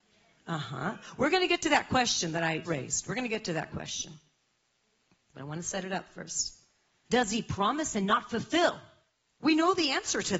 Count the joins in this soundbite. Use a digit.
2